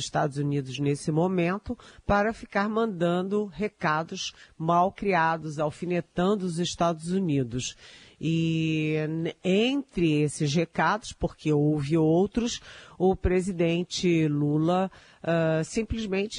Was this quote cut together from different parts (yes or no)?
no